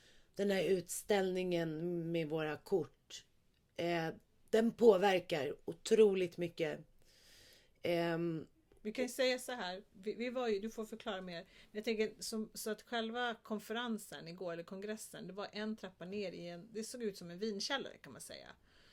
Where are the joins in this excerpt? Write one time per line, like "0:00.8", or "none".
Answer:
none